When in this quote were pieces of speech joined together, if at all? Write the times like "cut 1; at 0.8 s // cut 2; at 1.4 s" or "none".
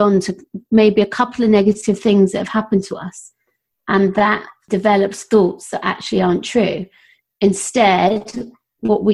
none